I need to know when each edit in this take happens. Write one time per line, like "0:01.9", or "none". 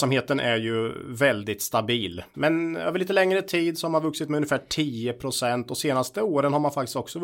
0:02.3